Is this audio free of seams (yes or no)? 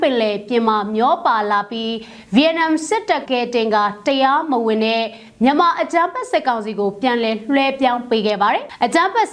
no